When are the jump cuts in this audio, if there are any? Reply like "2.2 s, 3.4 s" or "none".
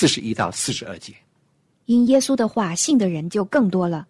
none